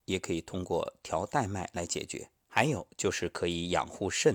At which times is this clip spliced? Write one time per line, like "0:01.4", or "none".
0:02.4